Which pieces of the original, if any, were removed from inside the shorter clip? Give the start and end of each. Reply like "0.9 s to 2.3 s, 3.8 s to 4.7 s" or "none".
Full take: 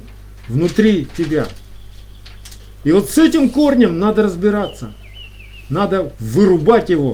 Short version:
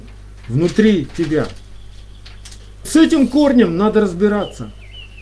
2.8 s to 3.1 s